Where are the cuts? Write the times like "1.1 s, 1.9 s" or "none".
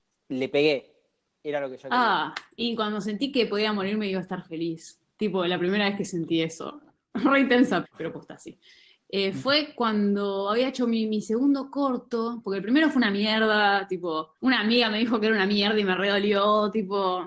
7.8 s, 14.4 s